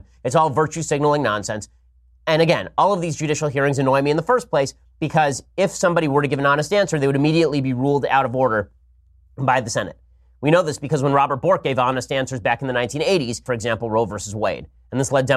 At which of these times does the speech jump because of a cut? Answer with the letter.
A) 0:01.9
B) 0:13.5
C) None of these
B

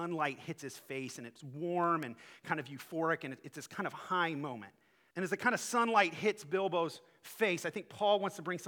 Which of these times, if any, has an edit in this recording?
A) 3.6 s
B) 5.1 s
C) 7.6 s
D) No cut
B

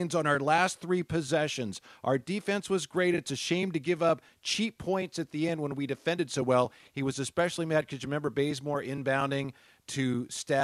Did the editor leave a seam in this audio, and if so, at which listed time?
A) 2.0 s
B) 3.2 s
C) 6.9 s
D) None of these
D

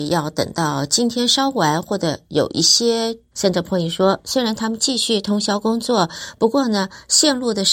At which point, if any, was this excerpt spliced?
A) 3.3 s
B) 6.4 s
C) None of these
A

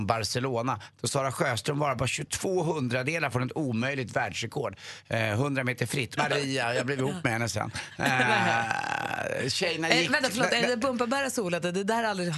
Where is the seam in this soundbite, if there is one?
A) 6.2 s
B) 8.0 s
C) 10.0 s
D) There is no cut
A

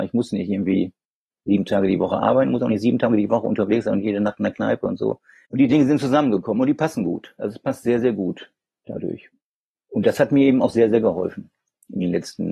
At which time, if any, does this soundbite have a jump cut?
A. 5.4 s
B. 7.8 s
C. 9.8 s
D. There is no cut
A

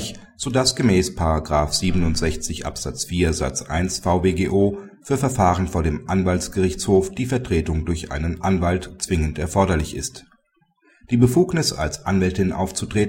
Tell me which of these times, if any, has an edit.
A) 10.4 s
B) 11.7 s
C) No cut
C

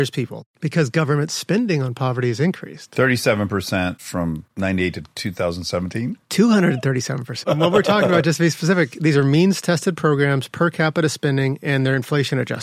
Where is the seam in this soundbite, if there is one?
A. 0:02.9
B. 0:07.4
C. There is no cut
B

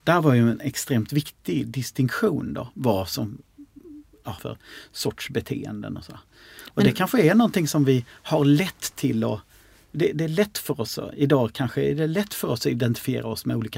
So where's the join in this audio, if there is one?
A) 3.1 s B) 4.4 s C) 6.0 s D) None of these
B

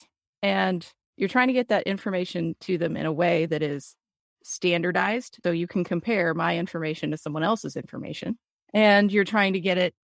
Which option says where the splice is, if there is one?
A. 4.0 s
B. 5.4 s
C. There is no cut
B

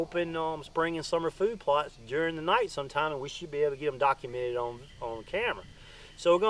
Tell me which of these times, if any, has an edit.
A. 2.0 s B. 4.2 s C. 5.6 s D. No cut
D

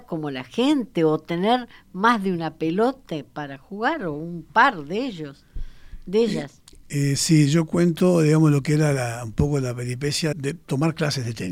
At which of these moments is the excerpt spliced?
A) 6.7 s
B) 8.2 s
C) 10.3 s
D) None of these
C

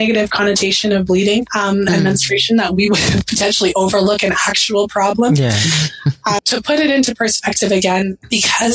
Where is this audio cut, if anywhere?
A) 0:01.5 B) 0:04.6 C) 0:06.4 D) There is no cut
C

